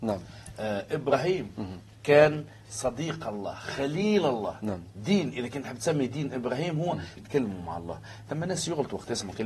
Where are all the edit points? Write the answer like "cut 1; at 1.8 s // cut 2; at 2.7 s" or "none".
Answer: cut 1; at 7.2 s